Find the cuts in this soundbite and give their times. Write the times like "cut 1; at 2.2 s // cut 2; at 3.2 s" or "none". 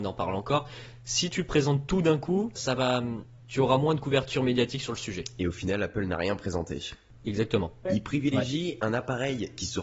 cut 1; at 2.6 s // cut 2; at 7.9 s